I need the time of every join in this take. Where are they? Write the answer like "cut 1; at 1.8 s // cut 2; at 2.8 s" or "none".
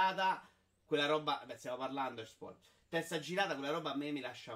none